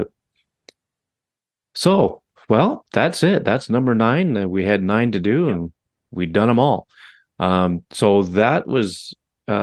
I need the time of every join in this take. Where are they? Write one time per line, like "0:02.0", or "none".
none